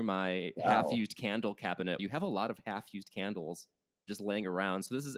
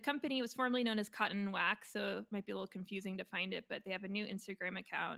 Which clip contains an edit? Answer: first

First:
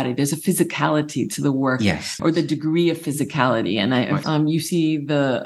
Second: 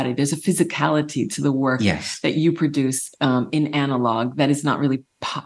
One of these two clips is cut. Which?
first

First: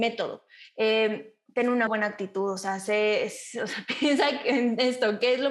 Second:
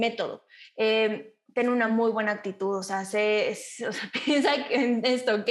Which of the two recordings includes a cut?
first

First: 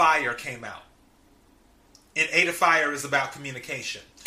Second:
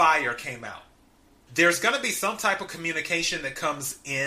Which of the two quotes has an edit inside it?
second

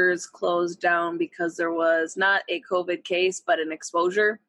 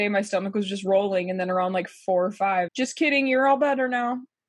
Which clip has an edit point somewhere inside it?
second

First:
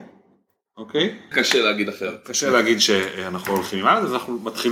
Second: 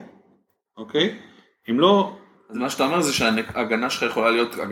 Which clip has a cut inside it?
first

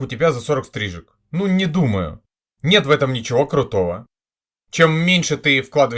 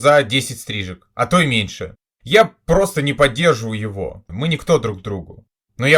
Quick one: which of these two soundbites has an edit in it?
second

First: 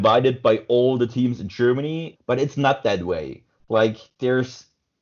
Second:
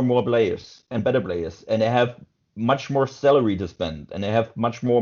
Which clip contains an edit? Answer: first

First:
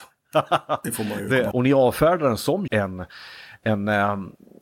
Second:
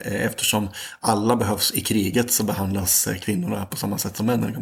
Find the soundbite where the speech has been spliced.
first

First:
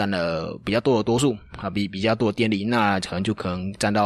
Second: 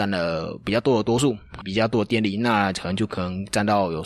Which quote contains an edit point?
second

